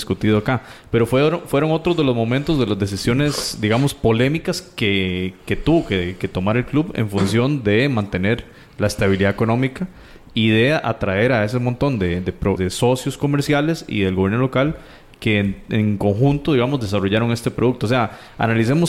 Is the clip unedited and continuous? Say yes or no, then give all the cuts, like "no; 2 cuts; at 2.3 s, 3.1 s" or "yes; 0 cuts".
no; 1 cut; at 12.6 s